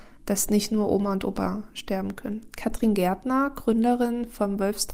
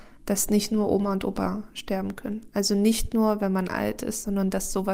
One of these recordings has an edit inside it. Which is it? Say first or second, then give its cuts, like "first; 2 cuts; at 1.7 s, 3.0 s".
first; 1 cut; at 2.5 s